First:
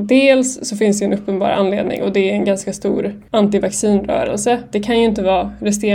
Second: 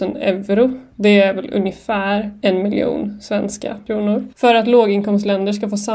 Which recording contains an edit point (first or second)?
first